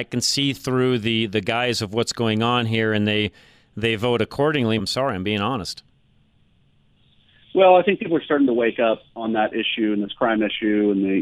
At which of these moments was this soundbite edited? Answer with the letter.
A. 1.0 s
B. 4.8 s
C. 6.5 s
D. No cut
B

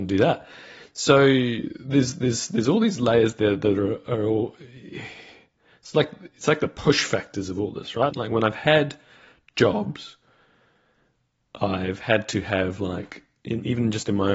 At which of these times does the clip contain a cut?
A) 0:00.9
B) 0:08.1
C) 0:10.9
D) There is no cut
B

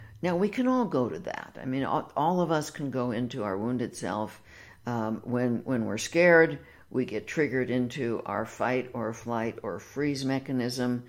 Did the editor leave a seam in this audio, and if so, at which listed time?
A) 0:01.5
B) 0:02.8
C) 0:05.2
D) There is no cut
D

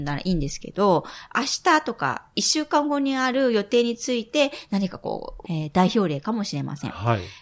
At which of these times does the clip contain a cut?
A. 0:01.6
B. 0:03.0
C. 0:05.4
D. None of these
C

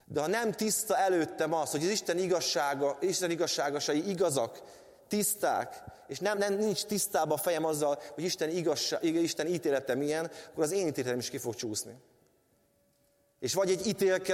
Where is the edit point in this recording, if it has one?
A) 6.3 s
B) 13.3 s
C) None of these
A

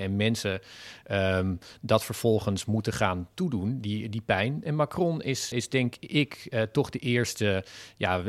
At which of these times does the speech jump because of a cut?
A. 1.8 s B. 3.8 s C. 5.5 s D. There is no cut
C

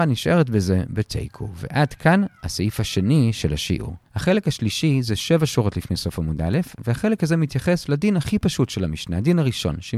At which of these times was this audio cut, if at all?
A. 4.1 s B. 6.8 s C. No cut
A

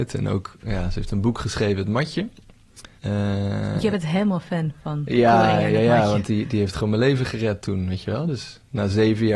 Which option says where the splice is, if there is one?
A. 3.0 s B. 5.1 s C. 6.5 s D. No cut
A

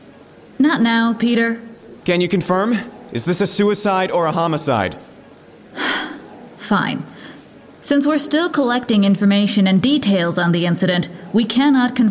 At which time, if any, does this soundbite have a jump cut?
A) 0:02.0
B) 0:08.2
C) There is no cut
A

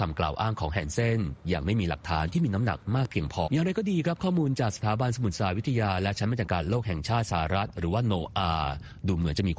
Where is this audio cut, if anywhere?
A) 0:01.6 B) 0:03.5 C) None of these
B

